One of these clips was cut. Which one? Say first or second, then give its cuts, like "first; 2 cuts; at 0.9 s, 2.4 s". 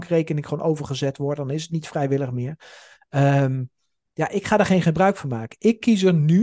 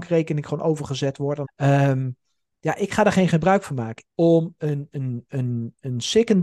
second; 2 cuts; at 1.4 s, 4.0 s